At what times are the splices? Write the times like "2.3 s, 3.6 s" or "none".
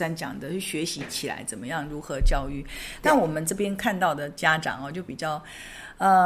none